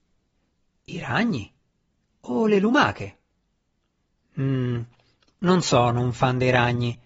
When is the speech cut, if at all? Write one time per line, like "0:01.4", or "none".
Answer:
none